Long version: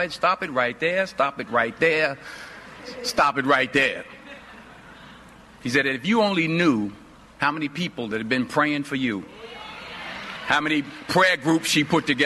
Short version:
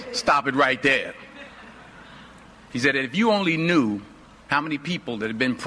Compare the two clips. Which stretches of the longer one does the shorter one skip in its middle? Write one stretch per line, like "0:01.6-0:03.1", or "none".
none